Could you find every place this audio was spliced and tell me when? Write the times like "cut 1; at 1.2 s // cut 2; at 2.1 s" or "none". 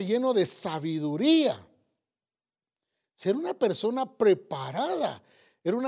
none